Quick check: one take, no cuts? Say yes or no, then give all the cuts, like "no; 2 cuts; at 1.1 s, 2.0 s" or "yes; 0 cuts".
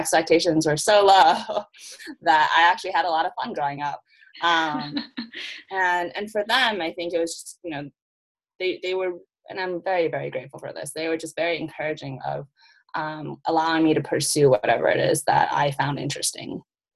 yes; 0 cuts